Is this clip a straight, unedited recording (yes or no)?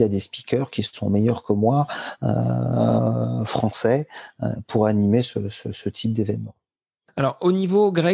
yes